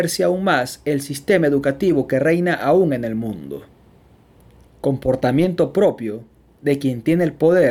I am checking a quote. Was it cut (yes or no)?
yes